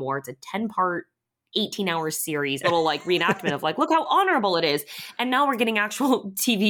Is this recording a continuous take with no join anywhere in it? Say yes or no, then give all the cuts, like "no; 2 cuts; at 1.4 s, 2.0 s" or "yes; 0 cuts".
no; 1 cut; at 2.6 s